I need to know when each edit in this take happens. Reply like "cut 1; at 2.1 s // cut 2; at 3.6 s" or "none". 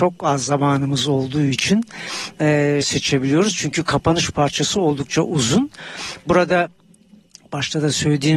cut 1; at 2.8 s